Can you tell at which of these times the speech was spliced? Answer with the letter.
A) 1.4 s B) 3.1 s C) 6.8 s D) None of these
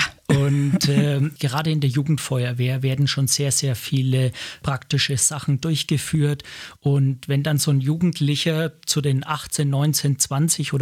A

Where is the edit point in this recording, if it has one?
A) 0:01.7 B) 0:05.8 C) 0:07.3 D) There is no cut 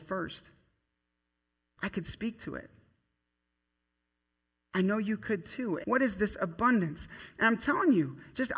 B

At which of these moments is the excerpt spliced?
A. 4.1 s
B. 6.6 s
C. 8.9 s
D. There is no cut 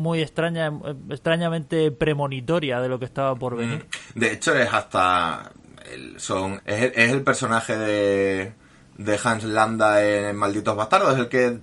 B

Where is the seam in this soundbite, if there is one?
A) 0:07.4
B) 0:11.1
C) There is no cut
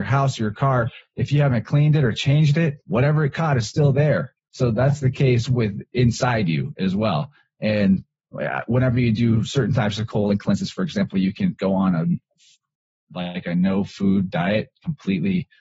C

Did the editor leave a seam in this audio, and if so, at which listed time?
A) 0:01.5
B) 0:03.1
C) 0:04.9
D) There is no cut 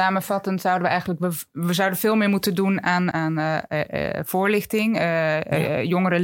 B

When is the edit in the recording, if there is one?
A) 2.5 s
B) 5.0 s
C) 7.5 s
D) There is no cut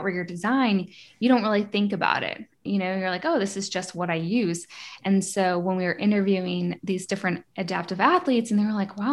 C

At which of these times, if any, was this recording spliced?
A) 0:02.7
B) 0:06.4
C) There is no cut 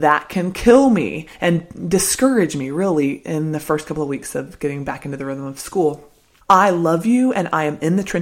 B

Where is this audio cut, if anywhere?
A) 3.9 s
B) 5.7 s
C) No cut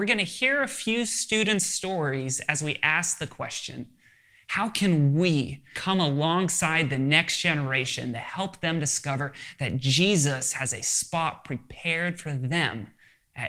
B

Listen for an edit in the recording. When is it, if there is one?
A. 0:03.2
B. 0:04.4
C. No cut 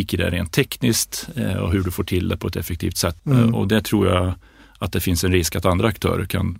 A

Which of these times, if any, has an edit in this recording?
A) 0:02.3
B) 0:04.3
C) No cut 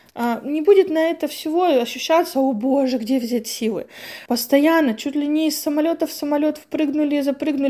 B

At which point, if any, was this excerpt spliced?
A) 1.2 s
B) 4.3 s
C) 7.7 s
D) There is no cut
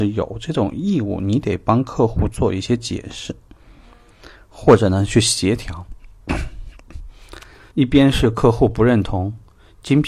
C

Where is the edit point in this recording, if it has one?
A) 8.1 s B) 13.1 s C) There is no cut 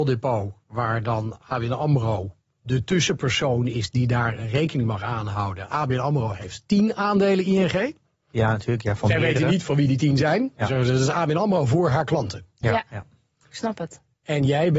C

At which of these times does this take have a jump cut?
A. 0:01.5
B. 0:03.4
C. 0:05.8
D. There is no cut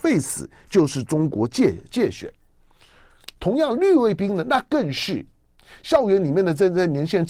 B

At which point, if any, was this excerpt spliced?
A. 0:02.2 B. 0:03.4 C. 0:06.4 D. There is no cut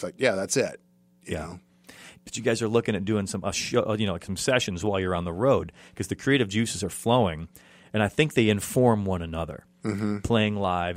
A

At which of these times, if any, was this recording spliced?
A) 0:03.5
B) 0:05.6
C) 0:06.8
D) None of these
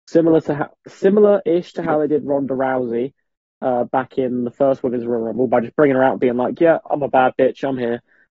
C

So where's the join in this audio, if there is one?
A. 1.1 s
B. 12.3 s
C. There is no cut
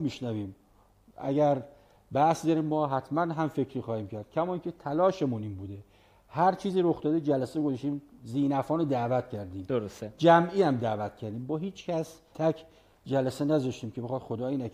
B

